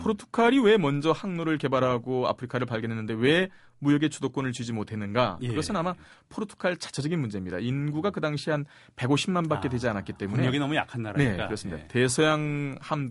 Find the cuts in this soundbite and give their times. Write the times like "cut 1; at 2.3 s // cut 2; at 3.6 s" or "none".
none